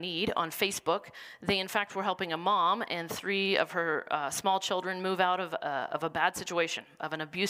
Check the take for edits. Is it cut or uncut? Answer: uncut